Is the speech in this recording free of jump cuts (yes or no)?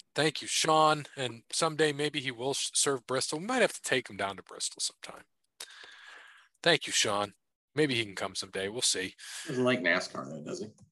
yes